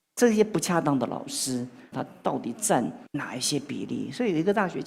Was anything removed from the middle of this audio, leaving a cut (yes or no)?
yes